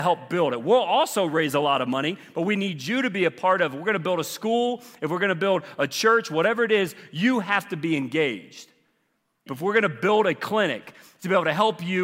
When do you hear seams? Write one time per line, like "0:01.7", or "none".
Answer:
0:09.5